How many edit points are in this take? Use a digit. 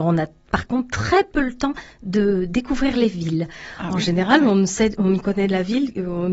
0